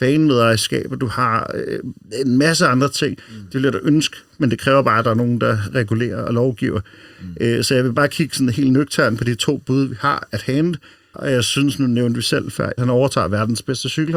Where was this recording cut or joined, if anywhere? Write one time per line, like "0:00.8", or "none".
0:11.1
0:12.8